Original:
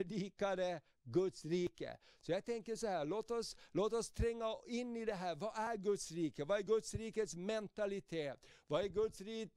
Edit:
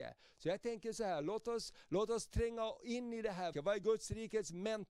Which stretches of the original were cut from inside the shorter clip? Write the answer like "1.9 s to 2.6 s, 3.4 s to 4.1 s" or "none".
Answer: 5.4 s to 6.4 s